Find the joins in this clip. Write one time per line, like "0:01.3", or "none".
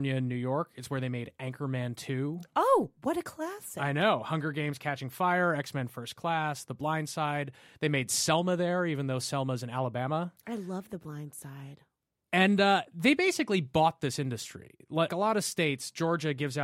0:15.1